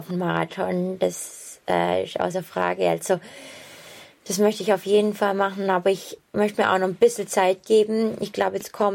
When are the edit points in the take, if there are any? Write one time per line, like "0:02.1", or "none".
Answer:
none